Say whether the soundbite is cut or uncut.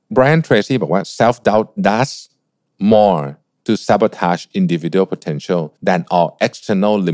cut